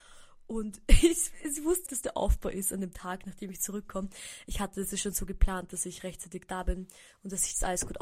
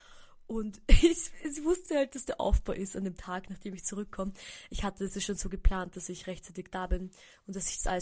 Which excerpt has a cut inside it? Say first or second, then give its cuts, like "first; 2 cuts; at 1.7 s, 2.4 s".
first; 1 cut; at 1.9 s